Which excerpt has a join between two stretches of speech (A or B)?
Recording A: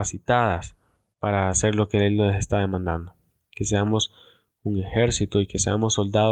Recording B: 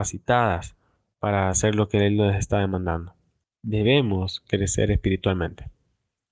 B